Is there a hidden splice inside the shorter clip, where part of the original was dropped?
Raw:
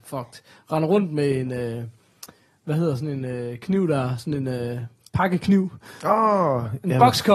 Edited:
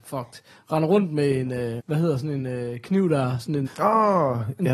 yes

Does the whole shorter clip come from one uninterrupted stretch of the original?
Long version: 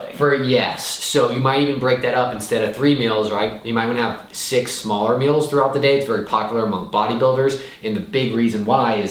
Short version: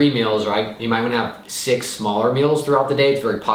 yes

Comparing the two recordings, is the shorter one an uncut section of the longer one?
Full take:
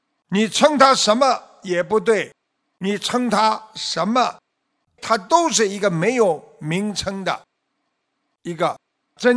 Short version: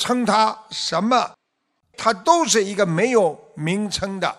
yes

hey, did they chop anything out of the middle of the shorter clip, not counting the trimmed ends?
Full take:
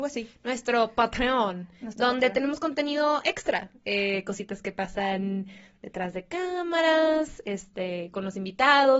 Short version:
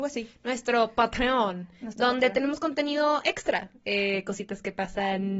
no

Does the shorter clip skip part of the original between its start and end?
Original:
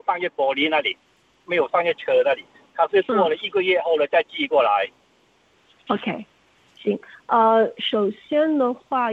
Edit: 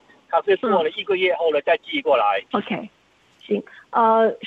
yes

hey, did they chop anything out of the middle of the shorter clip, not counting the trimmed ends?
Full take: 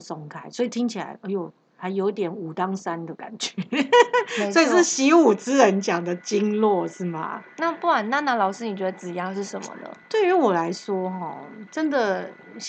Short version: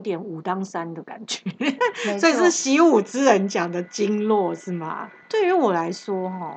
yes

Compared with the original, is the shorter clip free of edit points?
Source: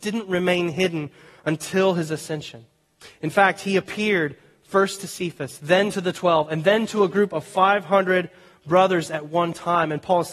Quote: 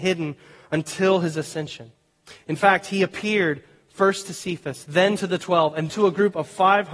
no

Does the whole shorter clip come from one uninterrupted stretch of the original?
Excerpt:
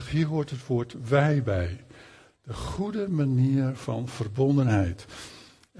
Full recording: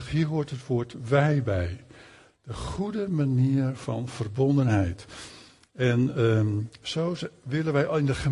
yes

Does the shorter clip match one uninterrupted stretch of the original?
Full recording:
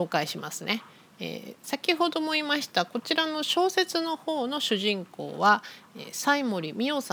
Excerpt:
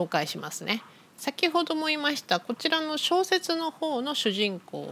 no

